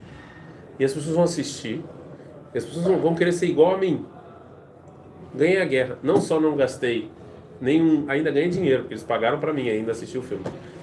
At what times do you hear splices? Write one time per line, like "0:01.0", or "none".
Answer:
0:08.1